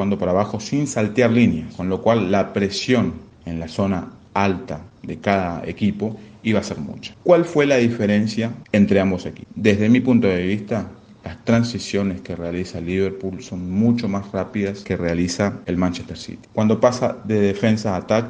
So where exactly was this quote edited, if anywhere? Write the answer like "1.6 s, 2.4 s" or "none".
none